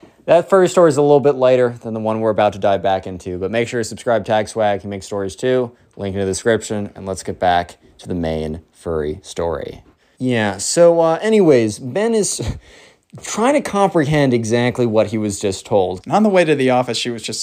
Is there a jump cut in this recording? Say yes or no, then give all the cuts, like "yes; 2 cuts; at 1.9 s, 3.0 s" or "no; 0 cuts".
yes; 2 cuts; at 10.2 s, 16.0 s